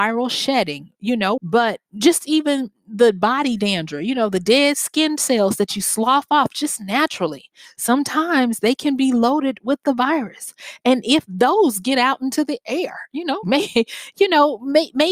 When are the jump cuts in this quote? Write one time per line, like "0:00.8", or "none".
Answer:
0:01.4
0:13.4